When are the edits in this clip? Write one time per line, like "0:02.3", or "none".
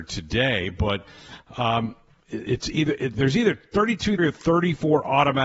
0:03.1
0:04.2